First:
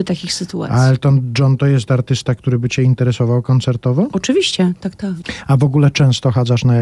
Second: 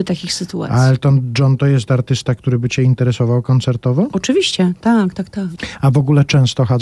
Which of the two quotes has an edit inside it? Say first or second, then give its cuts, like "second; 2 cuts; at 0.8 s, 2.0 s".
first; 1 cut; at 4.8 s